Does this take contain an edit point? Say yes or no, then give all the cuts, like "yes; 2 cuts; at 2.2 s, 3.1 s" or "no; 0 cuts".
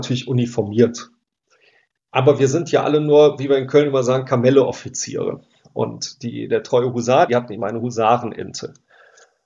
yes; 1 cut; at 7.3 s